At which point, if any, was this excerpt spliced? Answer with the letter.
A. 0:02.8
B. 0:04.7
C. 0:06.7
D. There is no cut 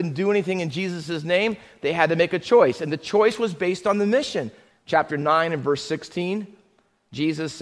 B